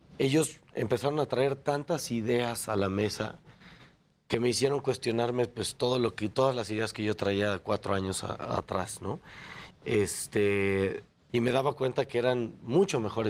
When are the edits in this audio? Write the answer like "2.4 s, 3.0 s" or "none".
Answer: 9.7 s, 11.3 s